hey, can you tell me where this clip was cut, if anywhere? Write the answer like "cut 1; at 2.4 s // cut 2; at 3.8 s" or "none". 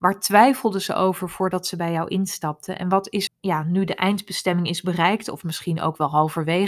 cut 1; at 3.3 s